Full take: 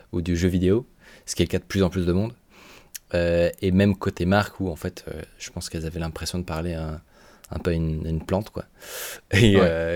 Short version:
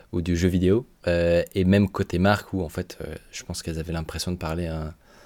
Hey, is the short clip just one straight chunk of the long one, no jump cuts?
no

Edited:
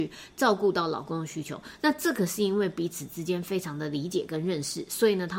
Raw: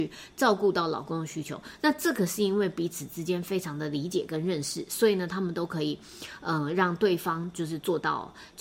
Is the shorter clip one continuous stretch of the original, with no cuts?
yes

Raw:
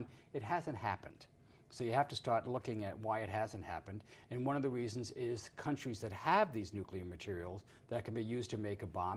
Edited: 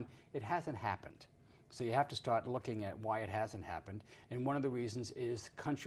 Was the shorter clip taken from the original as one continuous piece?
yes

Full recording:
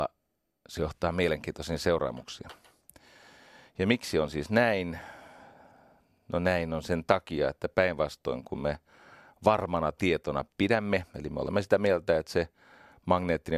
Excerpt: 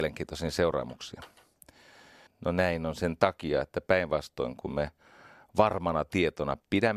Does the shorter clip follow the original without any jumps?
no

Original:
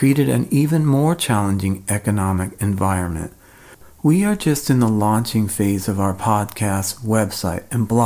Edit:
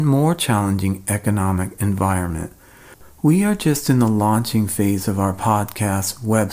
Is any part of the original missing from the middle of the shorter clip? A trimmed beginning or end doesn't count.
no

